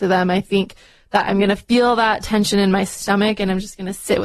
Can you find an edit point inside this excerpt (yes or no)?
no